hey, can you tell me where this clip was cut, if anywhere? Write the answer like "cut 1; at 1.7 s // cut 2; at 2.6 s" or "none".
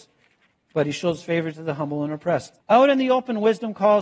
cut 1; at 2.6 s

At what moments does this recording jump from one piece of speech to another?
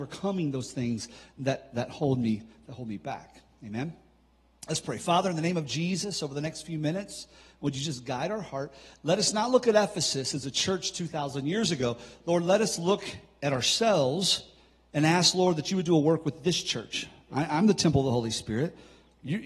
none

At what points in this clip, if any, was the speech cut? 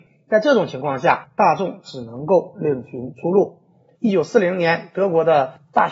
cut 1; at 3.9 s

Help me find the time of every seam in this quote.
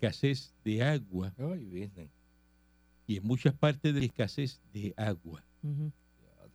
none

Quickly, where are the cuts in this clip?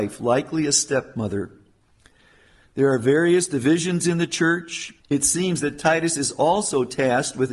cut 1; at 5.0 s

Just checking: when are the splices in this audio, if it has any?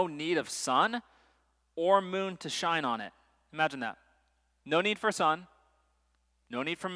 none

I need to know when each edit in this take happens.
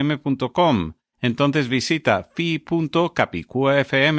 cut 1; at 1.1 s

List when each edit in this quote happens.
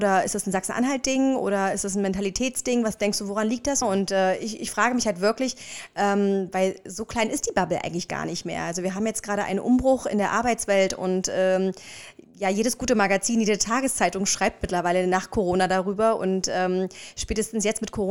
cut 1; at 3.8 s

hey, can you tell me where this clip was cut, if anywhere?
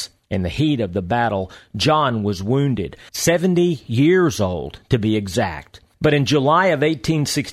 cut 1; at 3.1 s

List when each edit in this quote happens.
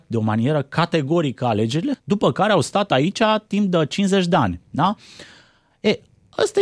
cut 1; at 1.9 s

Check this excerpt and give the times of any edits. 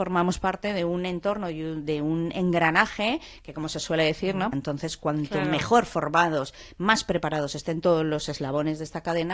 cut 1; at 4.5 s

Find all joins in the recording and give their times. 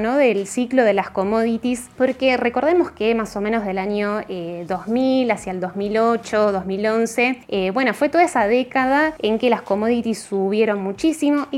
none

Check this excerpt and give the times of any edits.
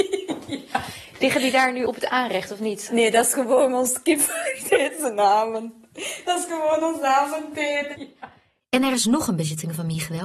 none

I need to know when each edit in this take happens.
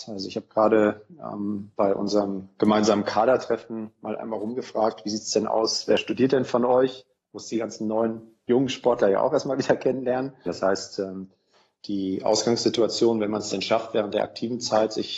cut 1; at 10.5 s

